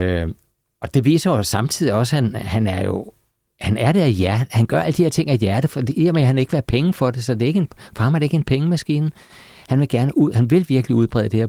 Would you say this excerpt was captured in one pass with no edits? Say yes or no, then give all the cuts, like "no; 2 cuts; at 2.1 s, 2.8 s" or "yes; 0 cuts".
yes; 0 cuts